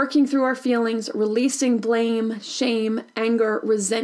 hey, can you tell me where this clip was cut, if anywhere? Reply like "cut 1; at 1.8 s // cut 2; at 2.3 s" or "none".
none